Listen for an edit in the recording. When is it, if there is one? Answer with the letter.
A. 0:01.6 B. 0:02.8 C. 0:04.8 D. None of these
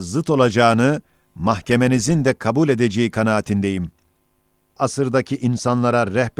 C